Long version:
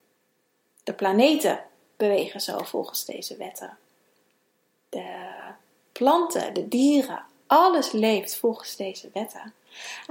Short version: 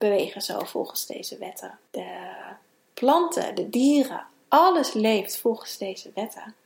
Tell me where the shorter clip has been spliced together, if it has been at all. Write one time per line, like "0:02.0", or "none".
0:01.9